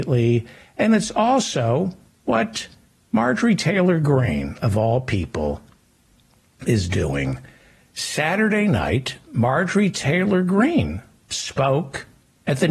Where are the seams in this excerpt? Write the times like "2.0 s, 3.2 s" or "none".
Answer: none